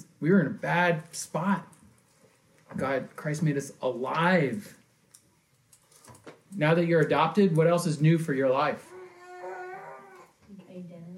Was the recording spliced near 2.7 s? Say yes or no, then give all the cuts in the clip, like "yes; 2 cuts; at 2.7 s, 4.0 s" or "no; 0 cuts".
no; 1 cut; at 6.4 s